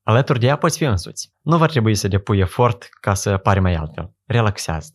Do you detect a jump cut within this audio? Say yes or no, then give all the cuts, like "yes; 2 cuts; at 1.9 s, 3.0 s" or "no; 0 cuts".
no; 0 cuts